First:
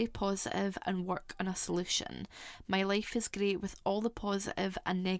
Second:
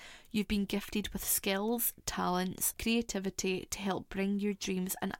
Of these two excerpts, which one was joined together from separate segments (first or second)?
second